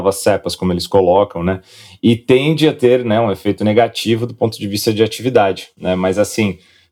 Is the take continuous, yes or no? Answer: yes